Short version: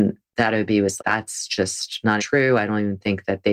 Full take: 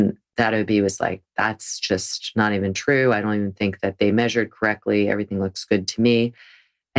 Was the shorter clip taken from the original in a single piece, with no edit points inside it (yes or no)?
no